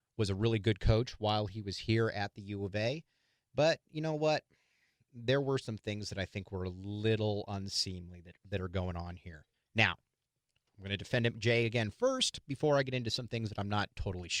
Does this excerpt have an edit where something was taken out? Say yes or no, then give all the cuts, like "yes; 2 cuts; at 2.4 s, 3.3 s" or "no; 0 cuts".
no; 0 cuts